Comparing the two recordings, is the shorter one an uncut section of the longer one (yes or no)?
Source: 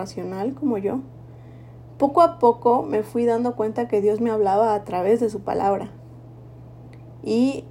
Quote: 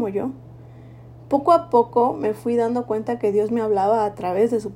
yes